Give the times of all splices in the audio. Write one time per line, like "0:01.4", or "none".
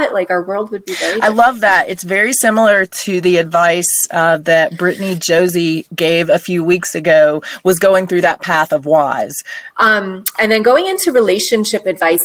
0:09.7